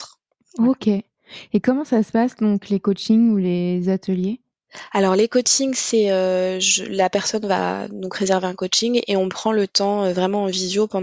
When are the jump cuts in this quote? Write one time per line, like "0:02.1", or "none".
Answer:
none

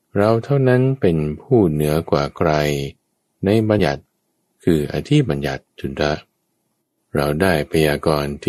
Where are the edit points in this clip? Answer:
0:03.8
0:05.7

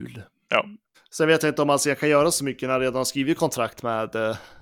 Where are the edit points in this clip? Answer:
0:00.9

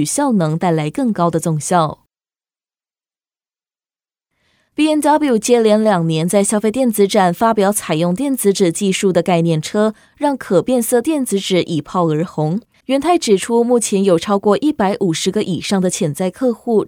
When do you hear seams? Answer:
0:12.8

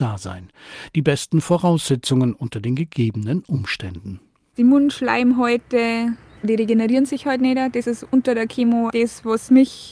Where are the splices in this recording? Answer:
0:08.9

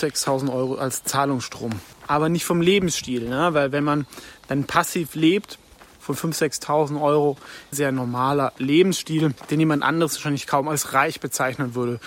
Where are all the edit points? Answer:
0:02.0
0:06.0
0:07.7

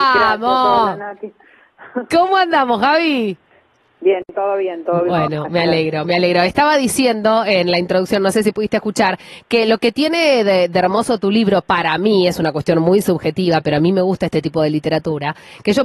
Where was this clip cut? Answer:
none

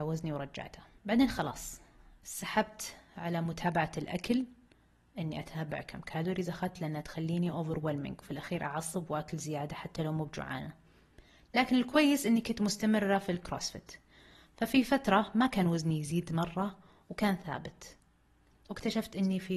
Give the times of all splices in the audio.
none

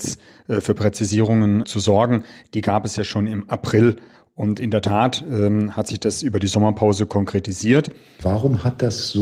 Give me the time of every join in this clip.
0:01.6
0:08.2

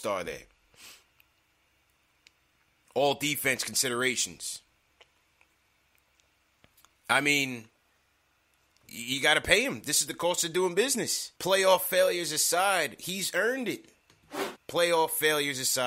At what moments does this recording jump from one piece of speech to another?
0:11.4
0:14.6

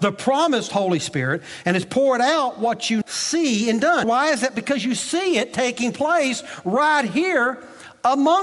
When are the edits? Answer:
0:03.0
0:04.0

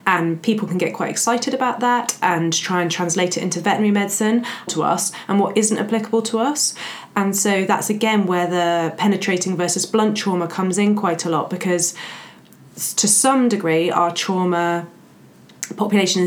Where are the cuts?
0:04.7

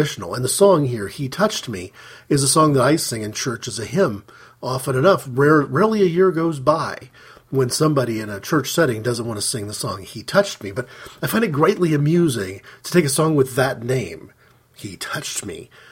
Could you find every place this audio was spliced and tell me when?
none

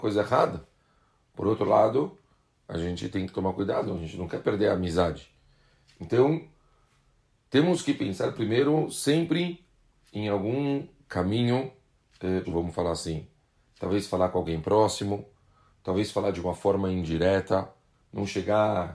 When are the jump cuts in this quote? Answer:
0:12.4

